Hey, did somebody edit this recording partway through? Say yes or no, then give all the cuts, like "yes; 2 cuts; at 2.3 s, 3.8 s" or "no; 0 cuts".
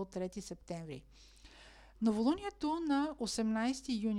no; 0 cuts